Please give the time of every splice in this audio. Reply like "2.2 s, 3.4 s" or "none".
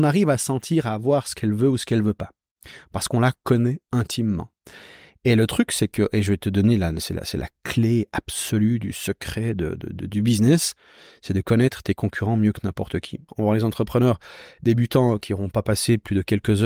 13.3 s